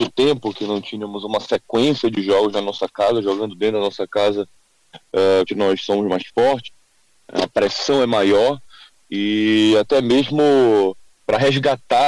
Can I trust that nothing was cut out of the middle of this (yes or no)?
no